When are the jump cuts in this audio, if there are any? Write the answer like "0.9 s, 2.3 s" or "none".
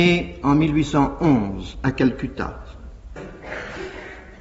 3.2 s